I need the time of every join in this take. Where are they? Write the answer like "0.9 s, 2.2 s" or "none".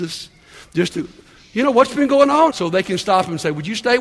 2.5 s

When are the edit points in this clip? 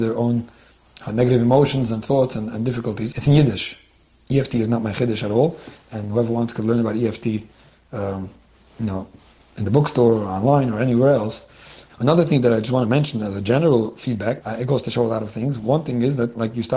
3.1 s, 11.9 s, 14.4 s

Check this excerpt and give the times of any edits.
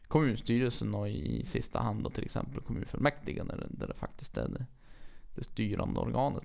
none

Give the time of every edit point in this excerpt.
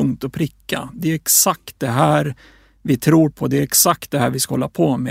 none

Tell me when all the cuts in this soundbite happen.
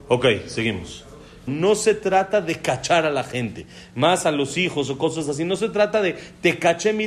1.5 s

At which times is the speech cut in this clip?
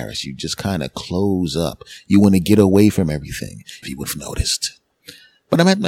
3.8 s

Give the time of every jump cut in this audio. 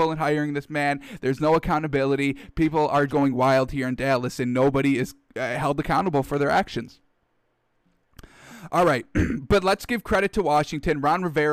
3.1 s

